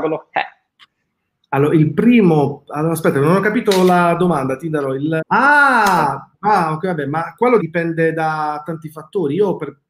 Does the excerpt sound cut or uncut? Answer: cut